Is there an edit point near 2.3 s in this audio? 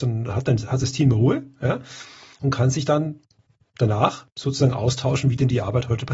no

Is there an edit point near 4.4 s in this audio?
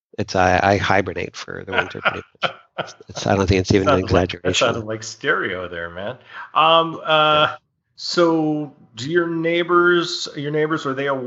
no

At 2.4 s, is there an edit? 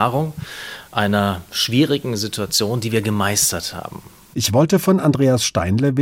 no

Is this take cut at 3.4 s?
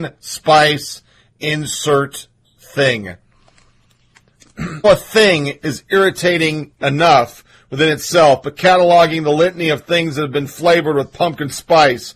no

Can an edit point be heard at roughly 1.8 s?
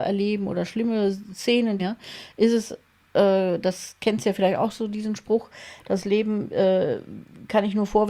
yes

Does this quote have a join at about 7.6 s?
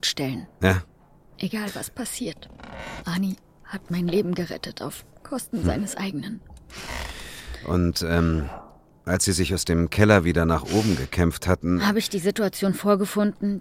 no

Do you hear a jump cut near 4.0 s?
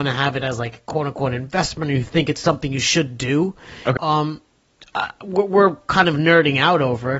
yes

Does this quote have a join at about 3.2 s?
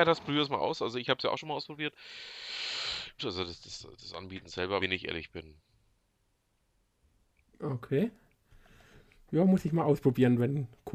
yes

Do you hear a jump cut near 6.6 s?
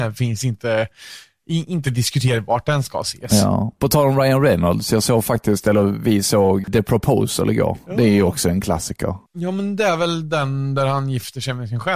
yes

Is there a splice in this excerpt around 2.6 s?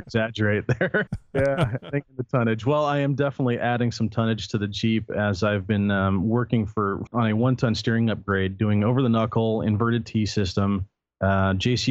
no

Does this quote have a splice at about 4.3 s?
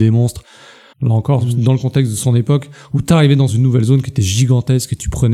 no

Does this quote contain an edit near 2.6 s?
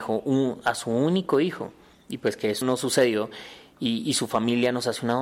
yes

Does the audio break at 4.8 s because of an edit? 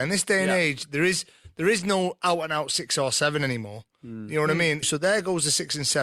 yes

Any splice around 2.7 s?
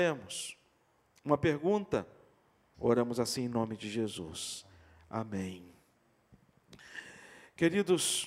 yes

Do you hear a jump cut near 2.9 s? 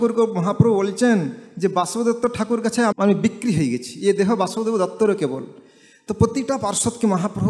yes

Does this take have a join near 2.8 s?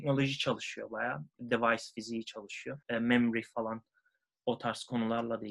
yes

